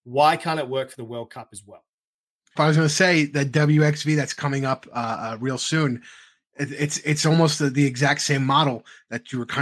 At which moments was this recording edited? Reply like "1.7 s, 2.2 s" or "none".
2.6 s